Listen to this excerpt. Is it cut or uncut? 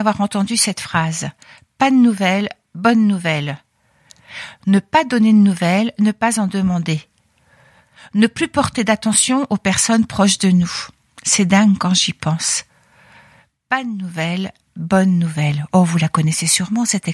uncut